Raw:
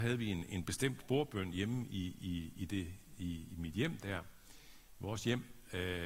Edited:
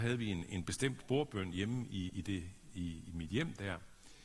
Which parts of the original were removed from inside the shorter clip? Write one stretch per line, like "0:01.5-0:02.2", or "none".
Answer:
0:02.1-0:02.5